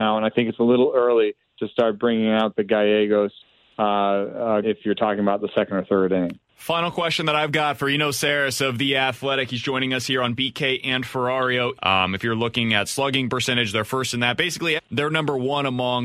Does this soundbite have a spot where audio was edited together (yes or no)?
yes